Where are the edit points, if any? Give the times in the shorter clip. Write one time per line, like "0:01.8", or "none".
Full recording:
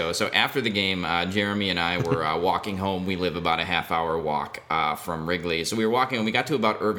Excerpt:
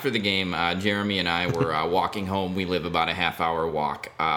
none